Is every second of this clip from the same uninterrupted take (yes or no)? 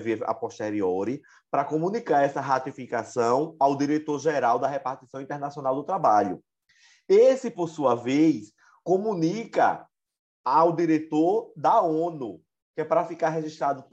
yes